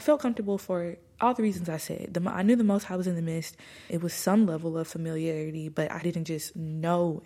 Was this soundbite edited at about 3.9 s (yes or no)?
yes